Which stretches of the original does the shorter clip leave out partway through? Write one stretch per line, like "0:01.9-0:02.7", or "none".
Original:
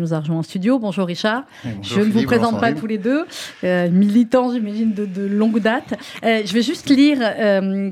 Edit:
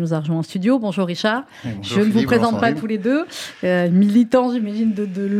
none